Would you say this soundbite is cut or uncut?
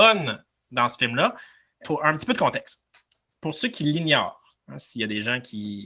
uncut